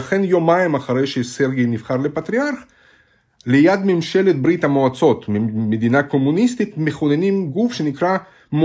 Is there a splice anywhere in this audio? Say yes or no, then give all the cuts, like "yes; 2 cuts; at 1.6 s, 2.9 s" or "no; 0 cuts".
no; 0 cuts